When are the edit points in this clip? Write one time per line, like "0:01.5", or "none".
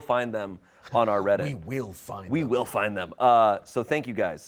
none